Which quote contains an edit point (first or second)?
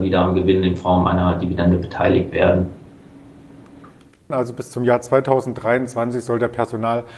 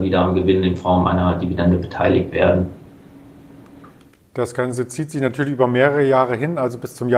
first